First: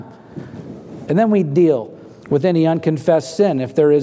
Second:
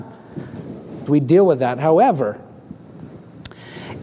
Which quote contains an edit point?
second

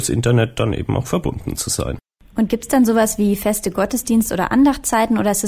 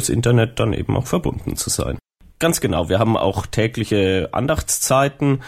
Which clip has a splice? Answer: second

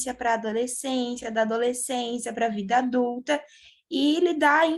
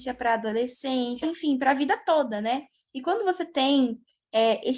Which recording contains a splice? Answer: second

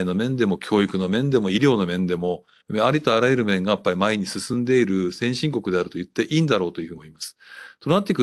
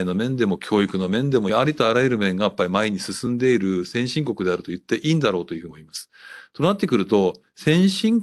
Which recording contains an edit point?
second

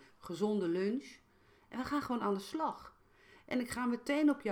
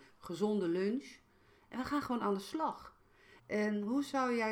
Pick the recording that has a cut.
second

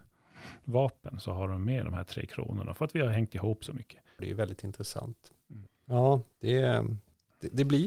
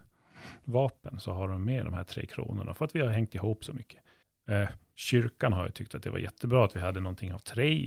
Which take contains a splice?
first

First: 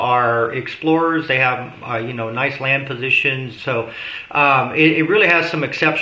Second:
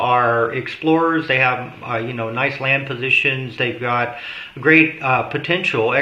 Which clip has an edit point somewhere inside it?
first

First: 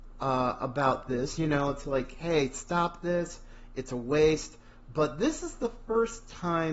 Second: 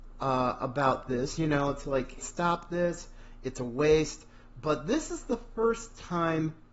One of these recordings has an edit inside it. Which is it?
second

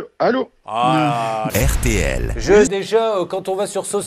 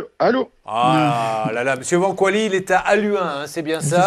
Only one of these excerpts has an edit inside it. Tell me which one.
first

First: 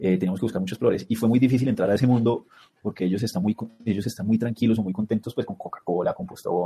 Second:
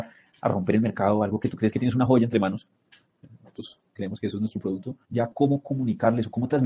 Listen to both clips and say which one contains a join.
second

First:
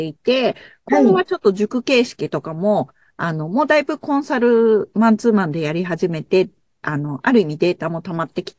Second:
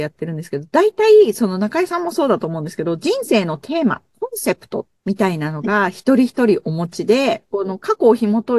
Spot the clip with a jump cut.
second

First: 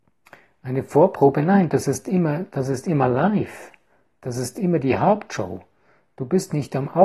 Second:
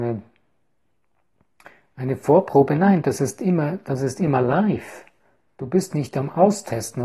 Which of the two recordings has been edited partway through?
second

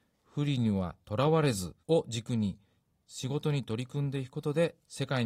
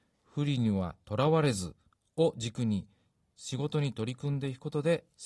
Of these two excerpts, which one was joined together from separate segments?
first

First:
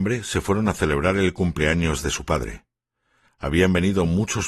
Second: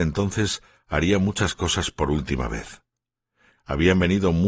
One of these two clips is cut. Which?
second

